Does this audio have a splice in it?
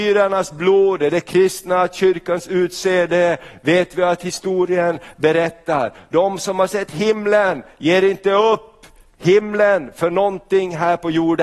no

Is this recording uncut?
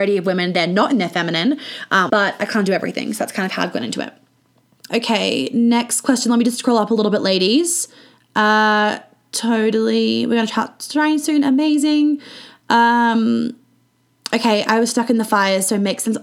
no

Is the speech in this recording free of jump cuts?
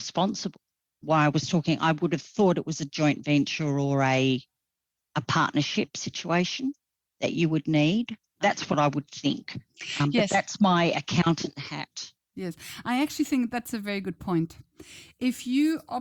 yes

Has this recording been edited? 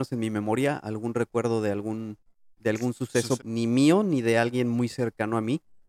yes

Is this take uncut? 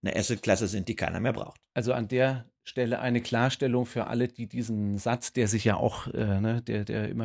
yes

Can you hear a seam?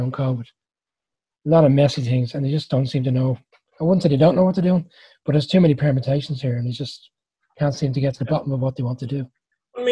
no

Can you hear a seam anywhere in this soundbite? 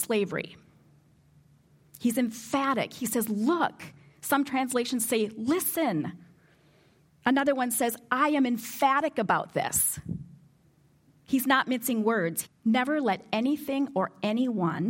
yes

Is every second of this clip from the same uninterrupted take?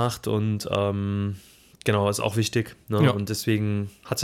yes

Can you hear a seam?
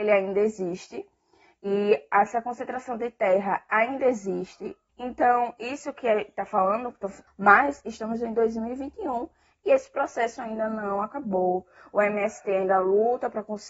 yes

